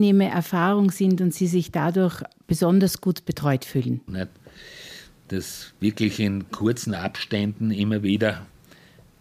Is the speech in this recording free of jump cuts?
no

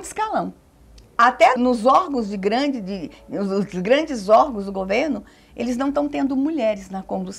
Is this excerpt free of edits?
no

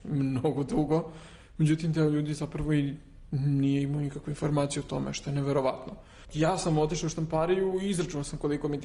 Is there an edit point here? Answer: yes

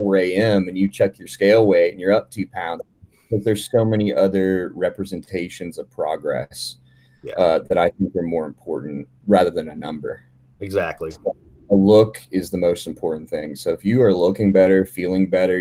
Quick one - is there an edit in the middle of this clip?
yes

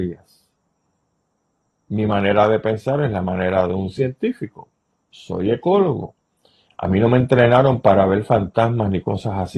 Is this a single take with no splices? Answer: yes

